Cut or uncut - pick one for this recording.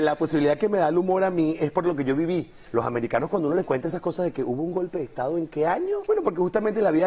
cut